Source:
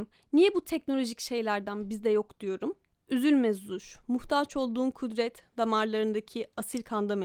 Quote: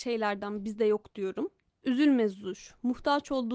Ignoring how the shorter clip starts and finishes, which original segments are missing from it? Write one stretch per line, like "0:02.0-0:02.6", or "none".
none